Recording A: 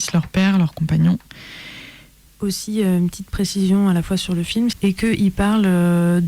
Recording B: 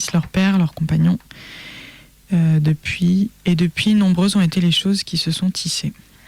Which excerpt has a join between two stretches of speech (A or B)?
A